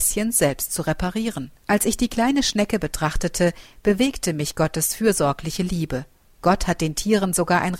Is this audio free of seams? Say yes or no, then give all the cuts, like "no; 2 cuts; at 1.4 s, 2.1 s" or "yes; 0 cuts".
no; 2 cuts; at 1.6 s, 6.2 s